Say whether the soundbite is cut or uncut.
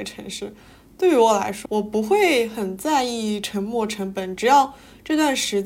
cut